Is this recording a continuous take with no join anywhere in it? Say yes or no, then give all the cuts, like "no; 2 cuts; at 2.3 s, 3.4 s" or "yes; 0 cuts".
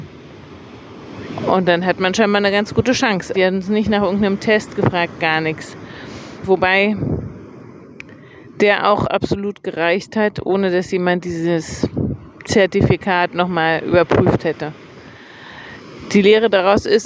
no; 2 cuts; at 3.3 s, 6.4 s